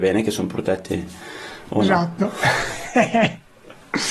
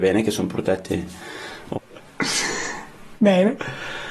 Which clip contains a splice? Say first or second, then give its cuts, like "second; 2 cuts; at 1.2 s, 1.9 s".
second; 1 cut; at 1.7 s